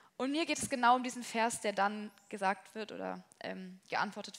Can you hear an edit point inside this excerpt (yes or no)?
no